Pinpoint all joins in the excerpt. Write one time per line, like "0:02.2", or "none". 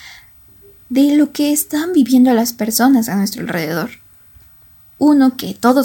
0:04.9